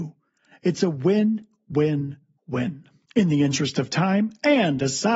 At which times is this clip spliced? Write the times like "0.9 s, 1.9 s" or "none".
3.1 s